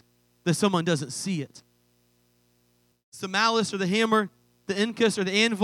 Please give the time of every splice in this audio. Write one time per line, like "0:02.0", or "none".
0:02.9